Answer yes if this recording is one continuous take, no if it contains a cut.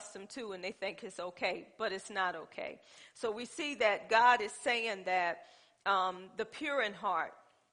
yes